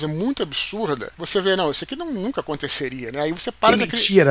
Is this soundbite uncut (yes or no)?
no